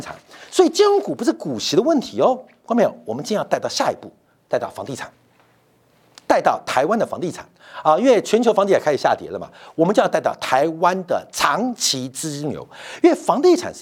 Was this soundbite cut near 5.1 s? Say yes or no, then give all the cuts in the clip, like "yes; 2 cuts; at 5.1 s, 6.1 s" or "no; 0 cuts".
no; 0 cuts